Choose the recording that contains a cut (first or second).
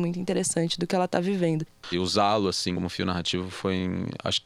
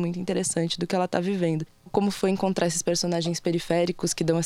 first